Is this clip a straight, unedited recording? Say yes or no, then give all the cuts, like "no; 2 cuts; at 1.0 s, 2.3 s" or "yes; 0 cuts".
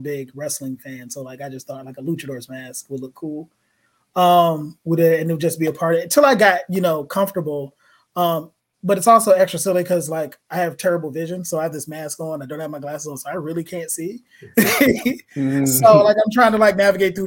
yes; 0 cuts